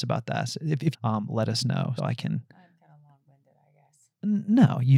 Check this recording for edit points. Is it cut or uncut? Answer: cut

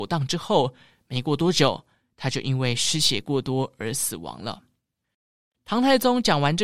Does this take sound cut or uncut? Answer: uncut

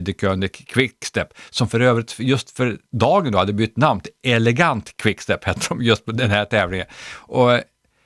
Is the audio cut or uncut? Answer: uncut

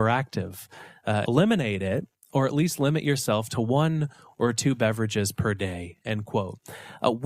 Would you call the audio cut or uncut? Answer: cut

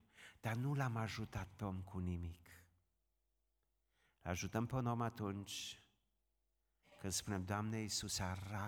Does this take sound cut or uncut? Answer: uncut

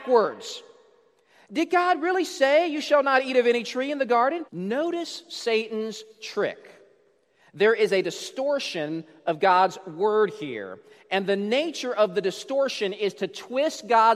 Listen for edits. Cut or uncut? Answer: cut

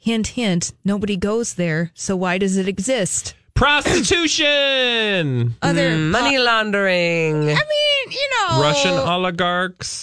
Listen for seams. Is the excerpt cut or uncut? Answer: uncut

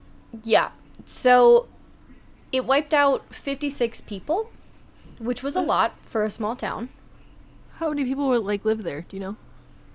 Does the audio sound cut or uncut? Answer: uncut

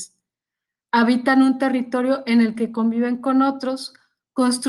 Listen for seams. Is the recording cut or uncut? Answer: uncut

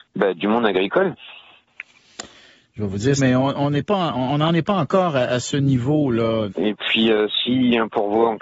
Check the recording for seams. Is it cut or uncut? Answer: cut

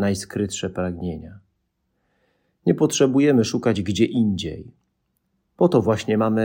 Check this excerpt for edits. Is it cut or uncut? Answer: uncut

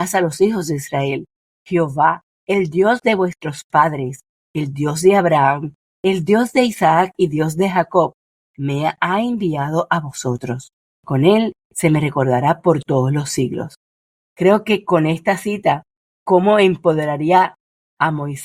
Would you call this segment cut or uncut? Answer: cut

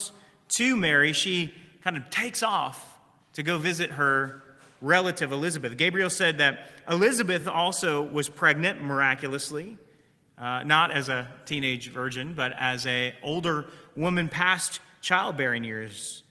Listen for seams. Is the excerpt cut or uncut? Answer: uncut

